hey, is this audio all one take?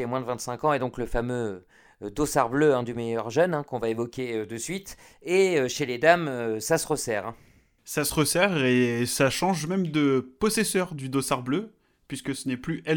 yes; 0 cuts

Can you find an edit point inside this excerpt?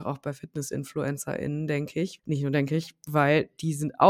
yes; 1 cut; at 2.2 s

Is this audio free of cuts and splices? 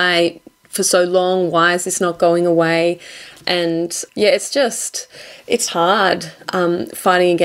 no; 2 cuts; at 4.1 s, 5.7 s

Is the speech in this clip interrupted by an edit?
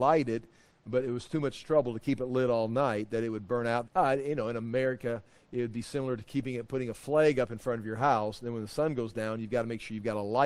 yes; 1 cut; at 3.8 s

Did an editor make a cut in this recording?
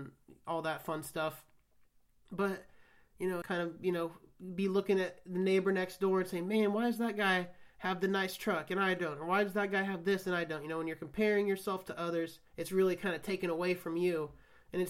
yes; 2 cuts; at 3.4 s, 12.5 s

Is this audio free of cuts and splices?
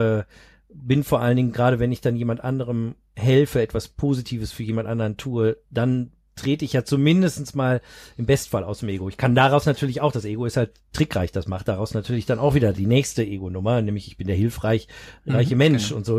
yes; 0 cuts

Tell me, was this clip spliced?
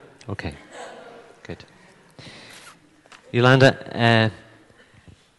no; 0 cuts

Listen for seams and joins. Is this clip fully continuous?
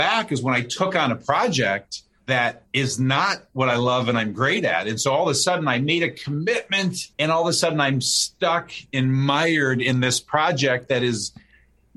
no; 1 cut; at 7.1 s

